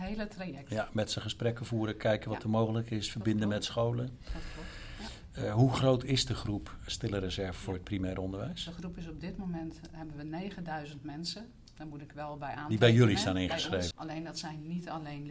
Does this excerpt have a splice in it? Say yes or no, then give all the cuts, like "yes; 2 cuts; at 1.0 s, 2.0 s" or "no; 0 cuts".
yes; 2 cuts; at 6.9 s, 13.9 s